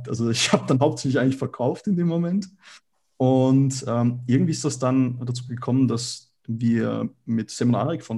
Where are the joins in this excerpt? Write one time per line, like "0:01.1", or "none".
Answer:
none